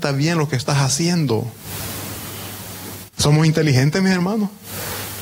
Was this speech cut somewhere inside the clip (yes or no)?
yes